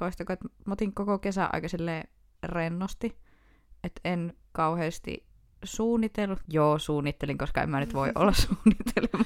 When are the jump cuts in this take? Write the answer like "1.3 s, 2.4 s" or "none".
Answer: 6.5 s